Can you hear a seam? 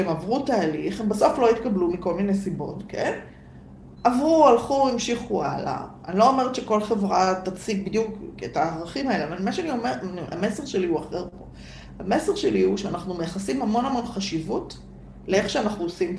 no; 0 cuts

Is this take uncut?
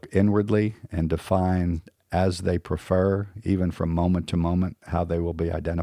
yes; 0 cuts

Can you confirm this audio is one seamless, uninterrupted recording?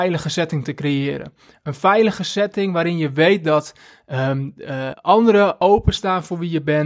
no; 1 cut; at 4.9 s

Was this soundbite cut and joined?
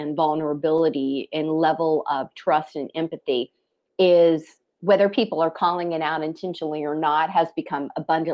no; 0 cuts

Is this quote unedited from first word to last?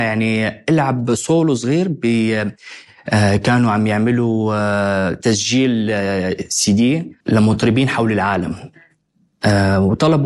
no; 1 cut; at 7.2 s

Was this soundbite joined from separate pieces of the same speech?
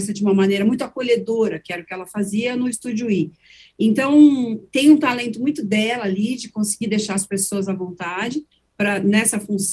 no; 0 cuts

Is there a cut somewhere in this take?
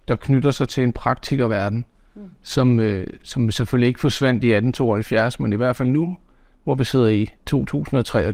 no; 0 cuts

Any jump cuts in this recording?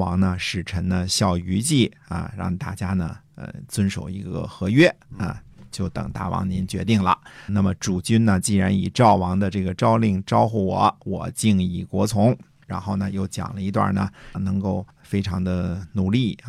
yes; 3 cuts; at 7.5 s, 12.6 s, 14.3 s

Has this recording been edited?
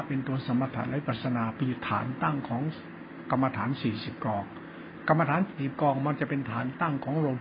no; 0 cuts

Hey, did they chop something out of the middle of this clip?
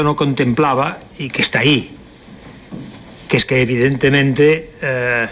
yes; 1 cut; at 1.3 s

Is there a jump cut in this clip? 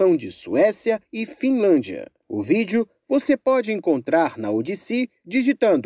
no; 0 cuts

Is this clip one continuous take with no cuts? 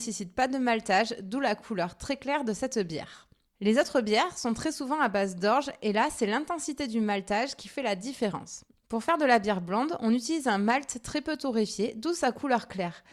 yes; 0 cuts

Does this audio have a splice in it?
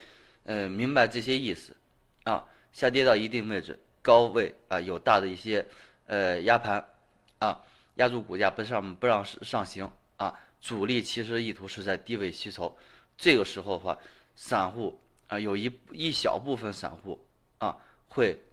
no; 0 cuts

